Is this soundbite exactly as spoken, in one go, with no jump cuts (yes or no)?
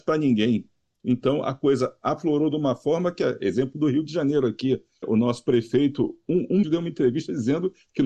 no